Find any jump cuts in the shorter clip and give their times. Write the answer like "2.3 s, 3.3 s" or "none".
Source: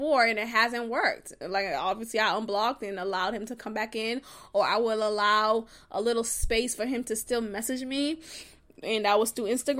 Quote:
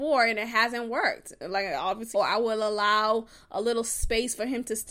2.1 s